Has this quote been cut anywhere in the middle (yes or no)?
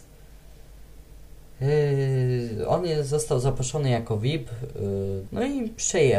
yes